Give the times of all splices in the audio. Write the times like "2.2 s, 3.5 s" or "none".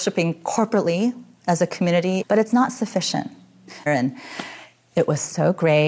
2.2 s, 3.9 s